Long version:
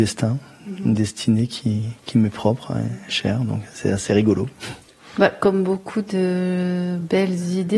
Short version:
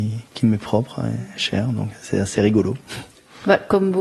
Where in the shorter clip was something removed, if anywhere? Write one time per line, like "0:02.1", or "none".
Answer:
none